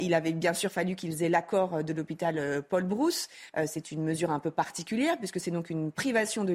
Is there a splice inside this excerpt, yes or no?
no